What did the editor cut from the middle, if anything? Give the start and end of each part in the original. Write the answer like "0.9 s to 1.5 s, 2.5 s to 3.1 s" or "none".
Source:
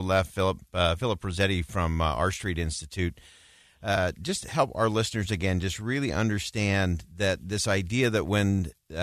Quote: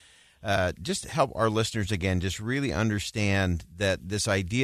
none